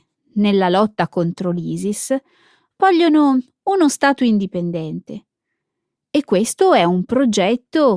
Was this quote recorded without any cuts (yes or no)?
yes